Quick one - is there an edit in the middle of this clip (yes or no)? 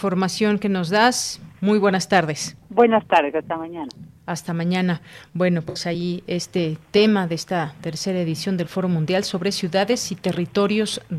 no